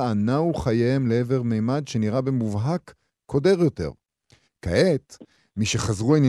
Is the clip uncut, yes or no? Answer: no